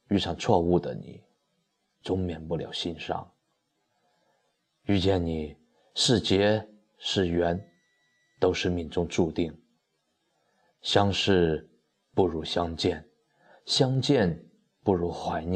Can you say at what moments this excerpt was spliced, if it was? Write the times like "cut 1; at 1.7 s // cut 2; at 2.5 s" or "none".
none